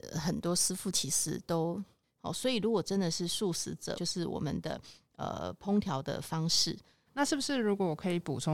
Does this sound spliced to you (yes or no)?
yes